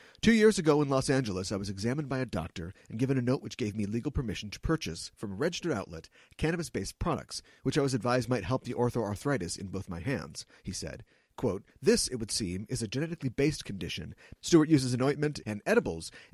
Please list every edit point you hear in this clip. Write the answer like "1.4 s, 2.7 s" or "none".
14.4 s, 15.4 s